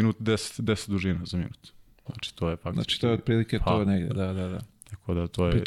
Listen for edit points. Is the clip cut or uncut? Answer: uncut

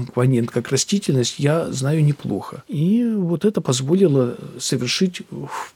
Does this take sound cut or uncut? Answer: uncut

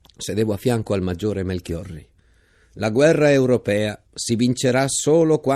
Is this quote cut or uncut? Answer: cut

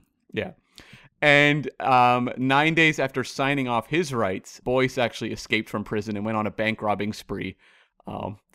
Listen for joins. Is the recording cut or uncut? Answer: cut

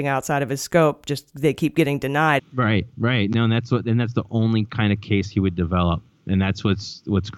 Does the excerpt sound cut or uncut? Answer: cut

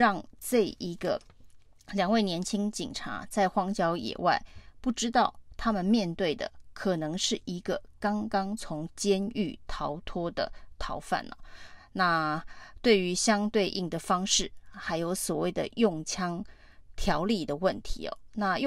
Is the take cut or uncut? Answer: uncut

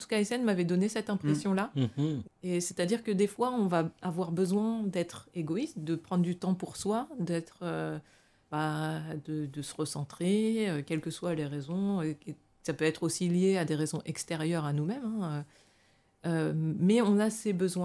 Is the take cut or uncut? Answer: cut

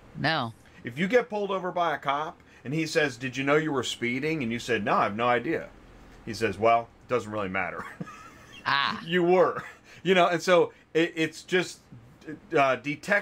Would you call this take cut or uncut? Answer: uncut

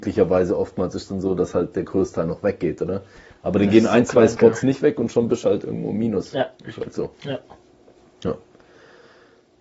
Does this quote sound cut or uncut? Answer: uncut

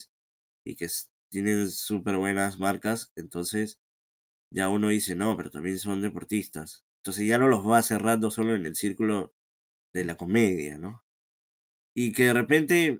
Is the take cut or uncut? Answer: cut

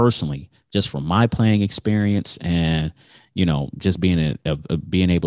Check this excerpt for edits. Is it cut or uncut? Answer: uncut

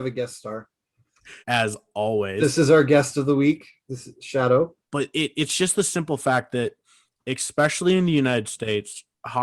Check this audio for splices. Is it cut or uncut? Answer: cut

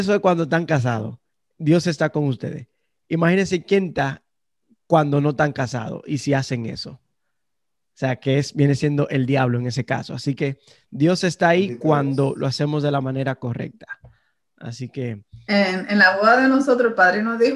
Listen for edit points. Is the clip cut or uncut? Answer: uncut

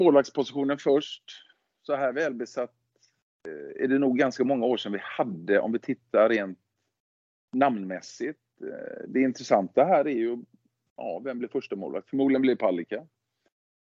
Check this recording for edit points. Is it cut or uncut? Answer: uncut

